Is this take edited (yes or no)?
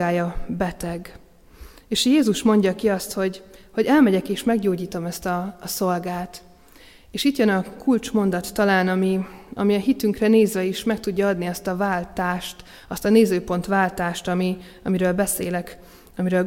no